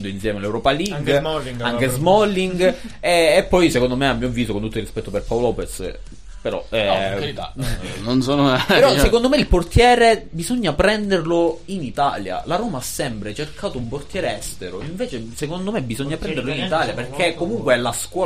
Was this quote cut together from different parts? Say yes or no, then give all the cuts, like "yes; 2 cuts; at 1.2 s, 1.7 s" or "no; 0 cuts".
no; 0 cuts